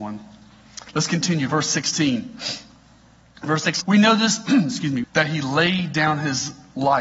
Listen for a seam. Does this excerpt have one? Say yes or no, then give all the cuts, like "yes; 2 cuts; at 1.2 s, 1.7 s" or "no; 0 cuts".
yes; 2 cuts; at 3.8 s, 5.0 s